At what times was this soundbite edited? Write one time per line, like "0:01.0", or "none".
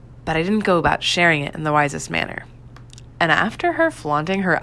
0:03.1